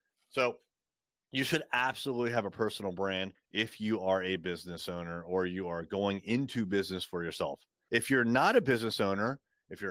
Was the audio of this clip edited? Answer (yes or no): no